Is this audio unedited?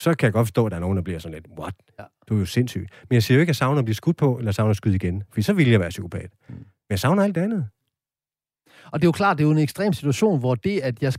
yes; 0 cuts

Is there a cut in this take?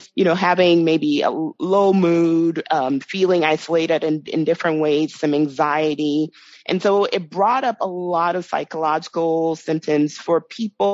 no; 0 cuts

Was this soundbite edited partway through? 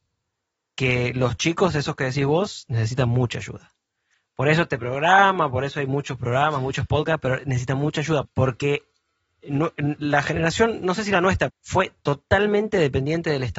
yes; 2 cuts; at 8.2 s, 11.5 s

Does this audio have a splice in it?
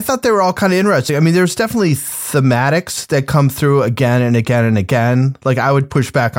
no; 0 cuts

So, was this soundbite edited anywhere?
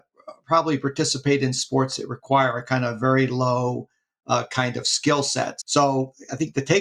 yes; 1 cut; at 5.6 s

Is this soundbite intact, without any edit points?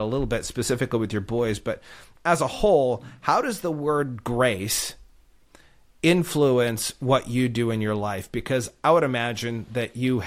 yes; 0 cuts

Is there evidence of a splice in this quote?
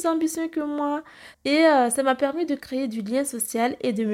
yes; 1 cut; at 1.3 s

